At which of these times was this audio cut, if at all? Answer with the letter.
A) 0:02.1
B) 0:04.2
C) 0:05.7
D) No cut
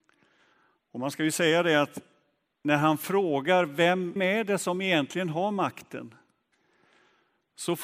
B